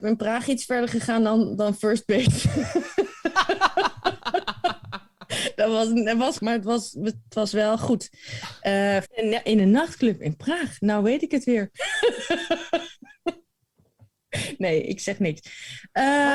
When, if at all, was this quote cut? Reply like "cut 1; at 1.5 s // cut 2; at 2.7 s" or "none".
cut 1; at 6.4 s // cut 2; at 9.0 s